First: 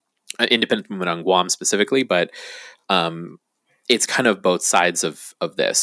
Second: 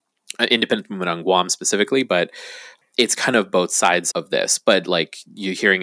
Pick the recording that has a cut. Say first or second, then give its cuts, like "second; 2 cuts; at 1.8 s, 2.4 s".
second; 2 cuts; at 2.8 s, 4.1 s